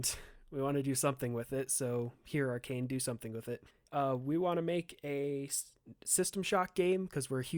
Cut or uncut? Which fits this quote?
cut